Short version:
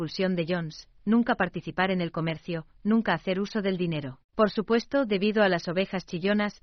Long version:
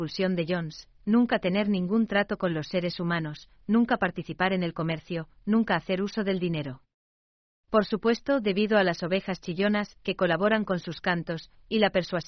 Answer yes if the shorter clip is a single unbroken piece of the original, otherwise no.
no